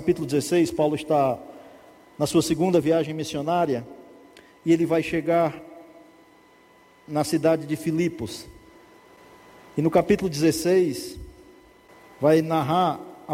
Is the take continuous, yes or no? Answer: yes